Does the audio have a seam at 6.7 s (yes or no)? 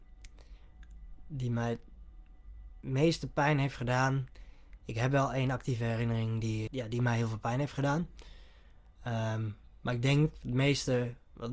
yes